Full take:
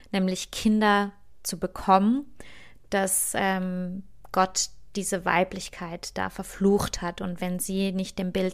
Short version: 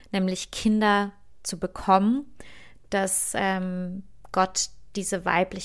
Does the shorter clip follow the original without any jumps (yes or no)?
yes